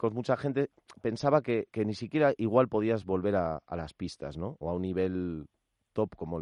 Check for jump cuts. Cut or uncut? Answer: uncut